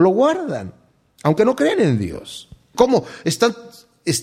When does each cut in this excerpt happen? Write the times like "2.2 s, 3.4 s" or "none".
2.7 s